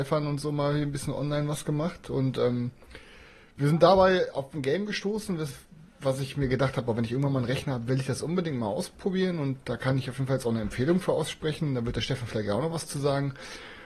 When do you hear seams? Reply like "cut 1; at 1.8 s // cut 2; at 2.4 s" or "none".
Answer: none